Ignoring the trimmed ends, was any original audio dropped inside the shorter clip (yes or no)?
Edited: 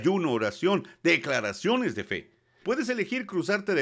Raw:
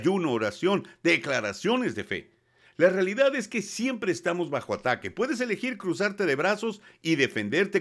yes